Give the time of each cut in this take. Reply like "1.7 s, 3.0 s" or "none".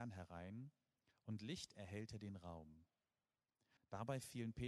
3.8 s